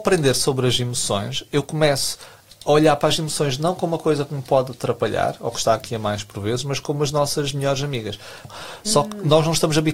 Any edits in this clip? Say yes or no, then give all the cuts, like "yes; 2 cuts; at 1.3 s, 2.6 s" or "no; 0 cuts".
yes; 1 cut; at 8.4 s